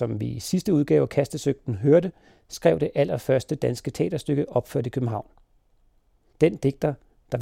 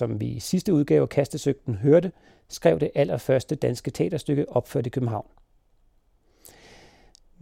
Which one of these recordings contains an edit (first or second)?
first